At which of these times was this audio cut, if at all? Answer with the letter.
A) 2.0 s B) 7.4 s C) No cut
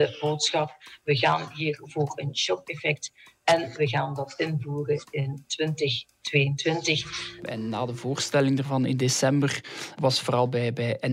C